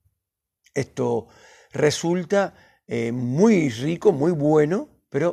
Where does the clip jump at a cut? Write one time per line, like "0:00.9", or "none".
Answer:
none